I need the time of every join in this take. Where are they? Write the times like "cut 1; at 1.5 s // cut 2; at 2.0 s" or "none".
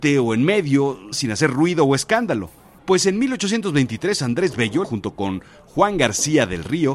cut 1; at 1.1 s // cut 2; at 2.8 s // cut 3; at 4.8 s